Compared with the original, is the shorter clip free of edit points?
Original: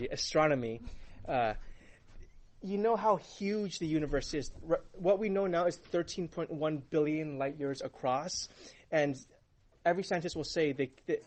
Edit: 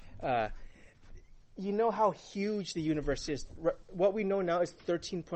yes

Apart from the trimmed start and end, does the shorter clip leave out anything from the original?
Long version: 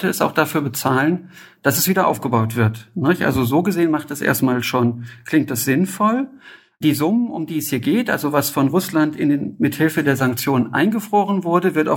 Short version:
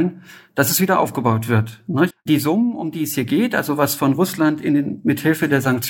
yes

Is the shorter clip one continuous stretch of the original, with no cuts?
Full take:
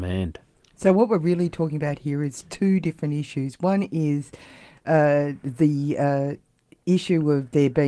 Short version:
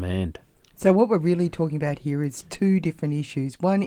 yes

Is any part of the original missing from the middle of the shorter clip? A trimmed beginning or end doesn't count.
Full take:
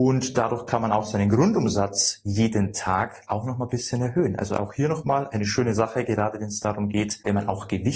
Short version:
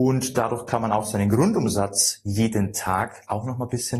no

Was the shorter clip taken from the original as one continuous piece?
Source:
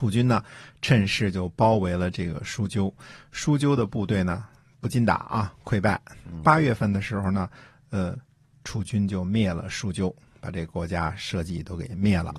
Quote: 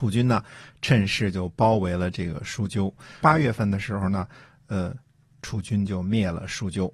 no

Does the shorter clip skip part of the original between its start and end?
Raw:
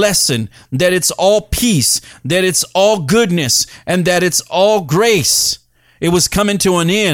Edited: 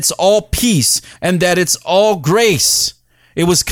yes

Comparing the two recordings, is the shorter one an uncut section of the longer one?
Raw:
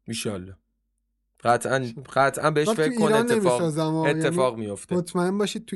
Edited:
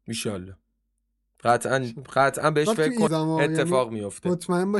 no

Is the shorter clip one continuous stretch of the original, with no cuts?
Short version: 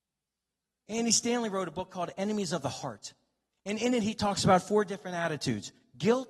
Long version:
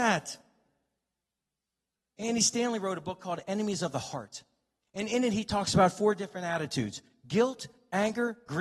yes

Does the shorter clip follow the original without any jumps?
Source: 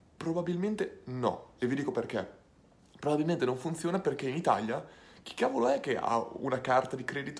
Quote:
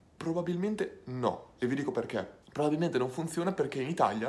no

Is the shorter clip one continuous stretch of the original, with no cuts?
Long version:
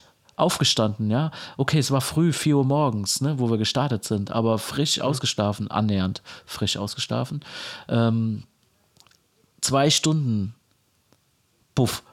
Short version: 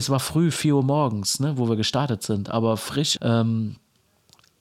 no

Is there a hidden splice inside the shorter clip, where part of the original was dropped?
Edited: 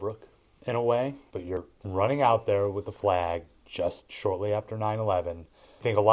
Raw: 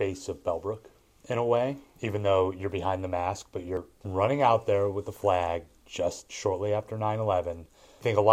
yes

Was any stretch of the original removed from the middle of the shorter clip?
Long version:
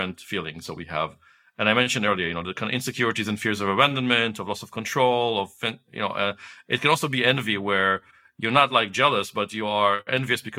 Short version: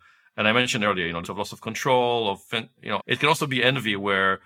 yes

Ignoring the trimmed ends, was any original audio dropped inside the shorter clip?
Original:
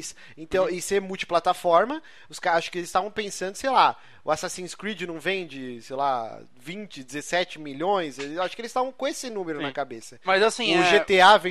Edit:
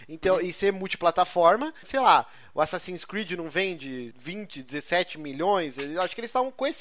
yes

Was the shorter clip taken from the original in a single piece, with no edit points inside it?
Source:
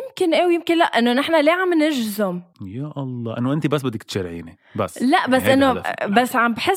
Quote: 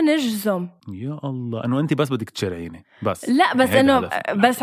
yes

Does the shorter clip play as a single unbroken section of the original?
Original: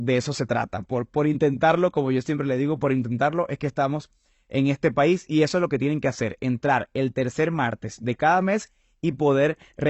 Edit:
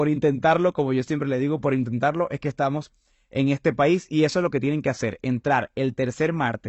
yes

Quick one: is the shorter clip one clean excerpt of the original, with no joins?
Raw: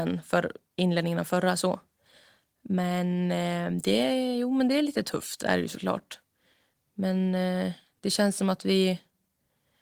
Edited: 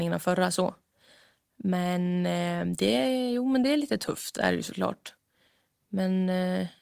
yes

